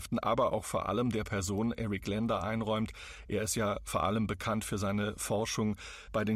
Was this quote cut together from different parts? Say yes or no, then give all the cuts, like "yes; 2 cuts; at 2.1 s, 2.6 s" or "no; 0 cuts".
no; 0 cuts